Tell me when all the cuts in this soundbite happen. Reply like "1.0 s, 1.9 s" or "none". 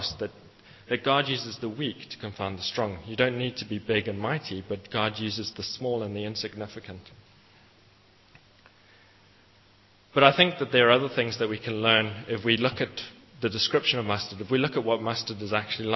none